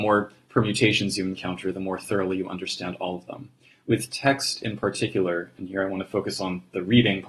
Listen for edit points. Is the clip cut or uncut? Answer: uncut